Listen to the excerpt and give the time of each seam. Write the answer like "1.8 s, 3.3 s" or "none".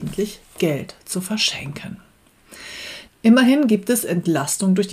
3.1 s